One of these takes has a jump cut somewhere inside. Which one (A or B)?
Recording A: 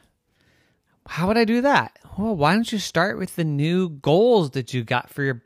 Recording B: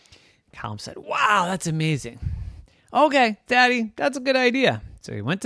B